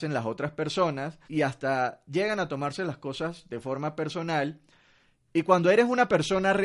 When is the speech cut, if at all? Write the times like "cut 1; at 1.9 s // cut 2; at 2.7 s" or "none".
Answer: cut 1; at 1.2 s